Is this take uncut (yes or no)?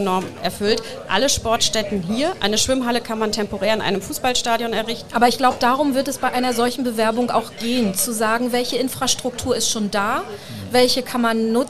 no